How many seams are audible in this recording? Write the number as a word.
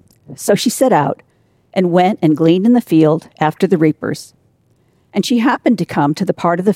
zero